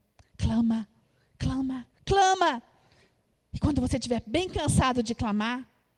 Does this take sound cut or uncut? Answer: cut